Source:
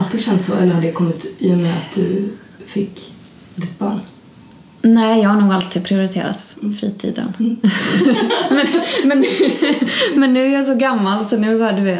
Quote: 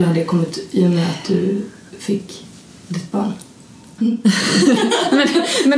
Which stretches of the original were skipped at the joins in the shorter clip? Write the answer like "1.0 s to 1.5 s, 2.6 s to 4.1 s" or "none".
4.7 s to 7.4 s